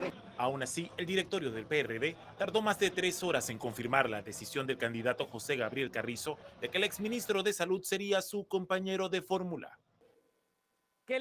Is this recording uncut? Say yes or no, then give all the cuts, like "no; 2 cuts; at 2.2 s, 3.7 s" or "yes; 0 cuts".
yes; 0 cuts